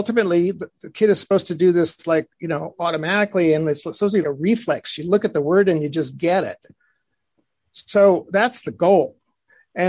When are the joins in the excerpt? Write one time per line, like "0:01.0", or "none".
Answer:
0:04.2